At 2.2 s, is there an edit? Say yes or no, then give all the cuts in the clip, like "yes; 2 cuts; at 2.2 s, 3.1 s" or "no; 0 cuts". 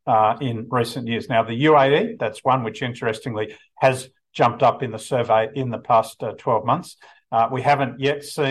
yes; 1 cut; at 2.2 s